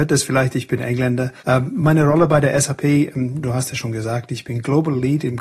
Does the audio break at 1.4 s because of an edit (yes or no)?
yes